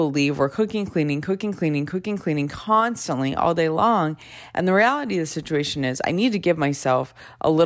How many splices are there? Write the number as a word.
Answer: one